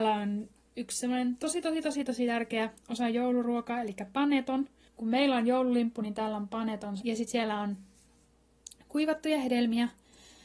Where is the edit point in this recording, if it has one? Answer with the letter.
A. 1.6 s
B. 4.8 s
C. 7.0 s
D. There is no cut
C